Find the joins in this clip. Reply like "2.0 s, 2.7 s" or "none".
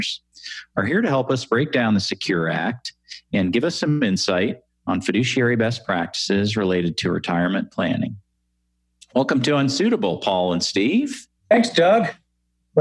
none

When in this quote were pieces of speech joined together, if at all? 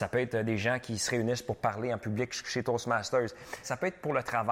3.6 s

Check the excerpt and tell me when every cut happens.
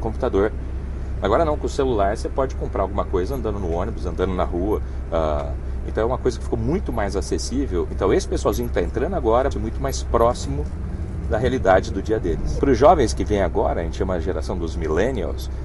7.9 s, 9.5 s, 12.6 s

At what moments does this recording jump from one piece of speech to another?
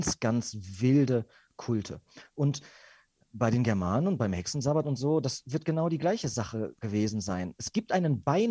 3.3 s

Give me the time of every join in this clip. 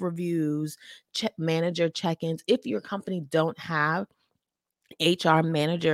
none

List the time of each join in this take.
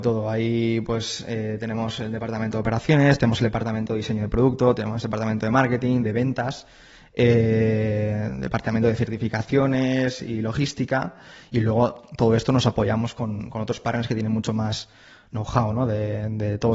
6.0 s

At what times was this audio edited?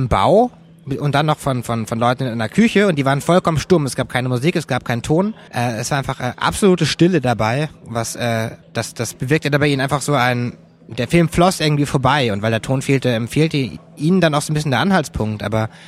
5.5 s, 8.6 s

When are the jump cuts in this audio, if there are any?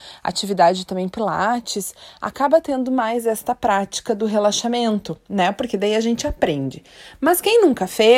none

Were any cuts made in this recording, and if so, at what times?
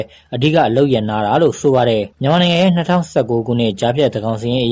2.1 s

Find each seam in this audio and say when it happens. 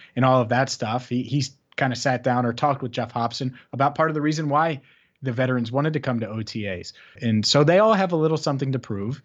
7.2 s

